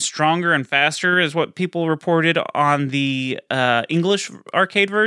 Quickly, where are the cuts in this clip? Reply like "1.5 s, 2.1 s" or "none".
none